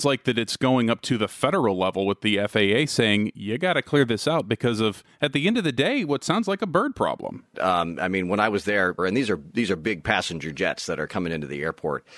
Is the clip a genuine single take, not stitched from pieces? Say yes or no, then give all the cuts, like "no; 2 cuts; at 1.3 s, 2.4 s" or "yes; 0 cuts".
no; 2 cuts; at 7.5 s, 9.0 s